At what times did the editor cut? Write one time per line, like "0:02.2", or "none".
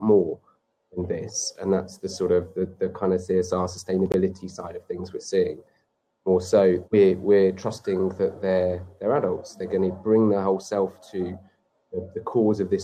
0:06.8